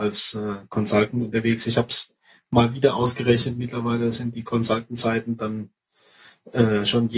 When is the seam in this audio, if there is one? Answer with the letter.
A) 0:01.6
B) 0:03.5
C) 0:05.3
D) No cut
D